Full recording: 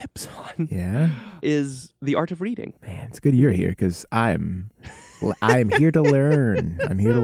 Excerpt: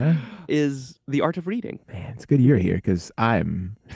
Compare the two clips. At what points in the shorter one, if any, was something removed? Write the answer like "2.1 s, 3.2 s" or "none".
none